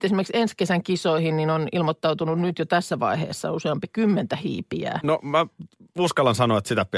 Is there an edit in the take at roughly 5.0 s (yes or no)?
yes